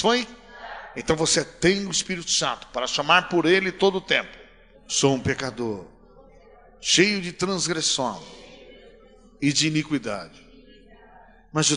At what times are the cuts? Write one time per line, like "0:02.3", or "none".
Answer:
0:04.7

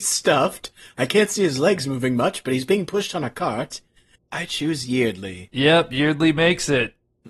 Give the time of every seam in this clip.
0:04.1

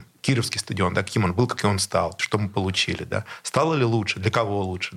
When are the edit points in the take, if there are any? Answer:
0:02.2

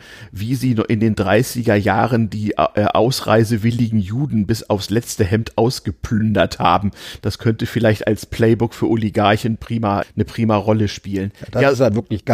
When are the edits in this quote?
0:10.0

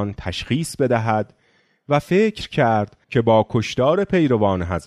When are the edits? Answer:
0:03.0

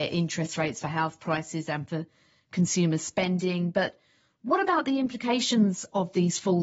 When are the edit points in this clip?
none

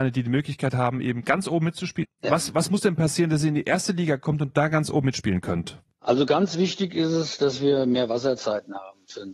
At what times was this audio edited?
0:02.0
0:05.9

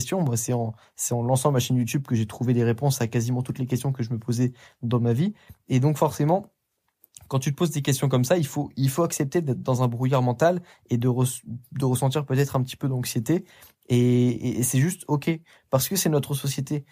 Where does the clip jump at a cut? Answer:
none

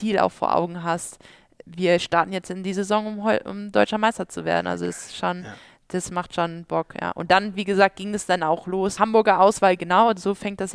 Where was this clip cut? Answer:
0:09.0

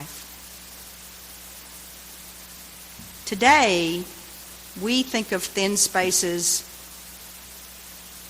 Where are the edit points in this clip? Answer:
0:03.2

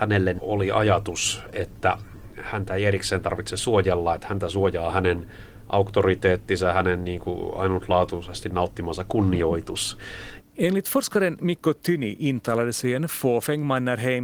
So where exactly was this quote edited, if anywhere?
0:10.4

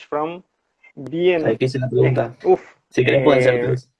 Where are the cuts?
0:00.9
0:02.4

